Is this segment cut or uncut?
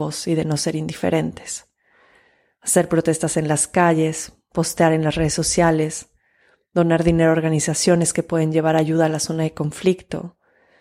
uncut